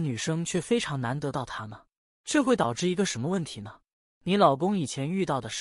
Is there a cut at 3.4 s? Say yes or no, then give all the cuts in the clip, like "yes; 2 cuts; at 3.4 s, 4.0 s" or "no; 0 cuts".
no; 1 cut; at 2.0 s